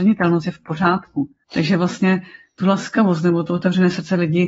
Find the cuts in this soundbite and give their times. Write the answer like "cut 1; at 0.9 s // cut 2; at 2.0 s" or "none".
cut 1; at 1.4 s

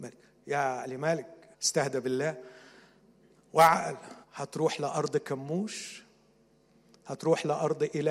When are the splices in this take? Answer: cut 1; at 1.5 s // cut 2; at 4.2 s

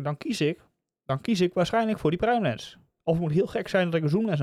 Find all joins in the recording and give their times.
none

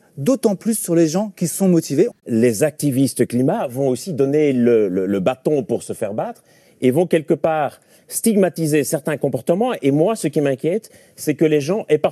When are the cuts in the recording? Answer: cut 1; at 2.1 s

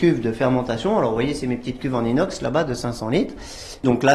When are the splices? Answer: none

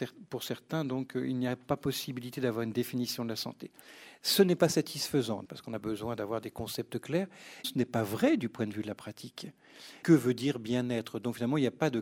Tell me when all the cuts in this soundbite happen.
cut 1; at 5.5 s // cut 2; at 7.6 s // cut 3; at 10.0 s

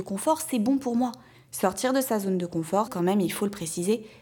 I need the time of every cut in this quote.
cut 1; at 1.3 s // cut 2; at 2.9 s

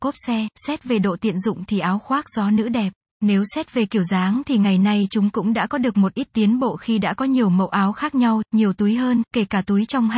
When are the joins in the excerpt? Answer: cut 1; at 3.1 s // cut 2; at 8.5 s

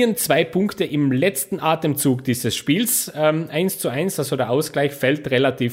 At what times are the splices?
none

